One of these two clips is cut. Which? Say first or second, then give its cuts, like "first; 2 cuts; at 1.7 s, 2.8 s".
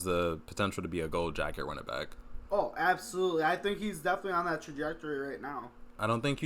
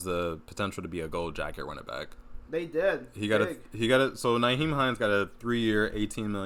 second; 1 cut; at 2.5 s